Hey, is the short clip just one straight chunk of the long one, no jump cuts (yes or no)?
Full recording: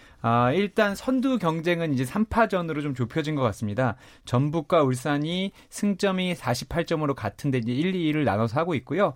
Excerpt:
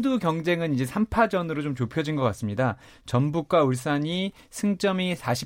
yes